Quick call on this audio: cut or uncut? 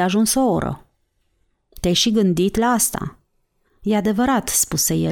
cut